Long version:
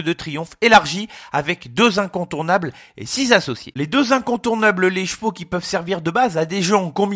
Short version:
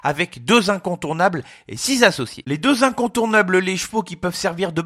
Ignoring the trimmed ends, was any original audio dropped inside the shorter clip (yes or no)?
no